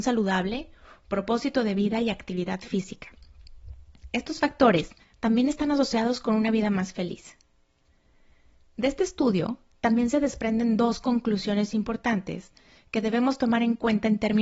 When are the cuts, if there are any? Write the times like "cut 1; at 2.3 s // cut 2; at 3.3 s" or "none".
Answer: cut 1; at 5.0 s